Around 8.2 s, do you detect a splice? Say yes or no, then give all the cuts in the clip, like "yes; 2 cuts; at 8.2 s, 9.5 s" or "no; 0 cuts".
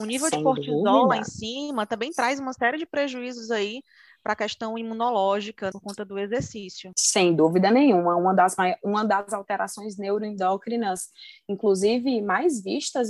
no; 1 cut; at 5.7 s